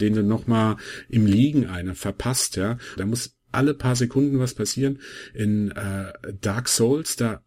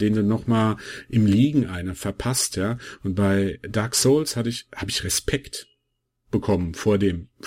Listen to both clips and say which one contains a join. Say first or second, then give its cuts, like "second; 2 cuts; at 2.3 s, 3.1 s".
first; 1 cut; at 3.0 s